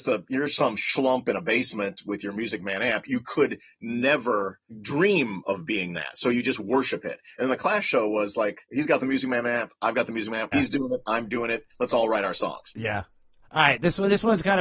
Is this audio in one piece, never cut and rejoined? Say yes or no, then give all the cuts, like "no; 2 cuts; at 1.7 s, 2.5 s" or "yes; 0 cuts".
no; 2 cuts; at 8.7 s, 10.5 s